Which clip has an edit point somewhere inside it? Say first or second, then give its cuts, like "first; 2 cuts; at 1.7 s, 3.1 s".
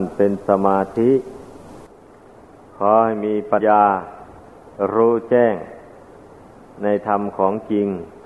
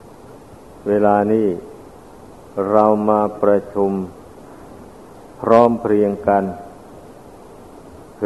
first; 1 cut; at 3.6 s